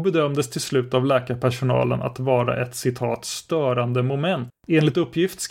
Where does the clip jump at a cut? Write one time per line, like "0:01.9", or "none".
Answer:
0:04.5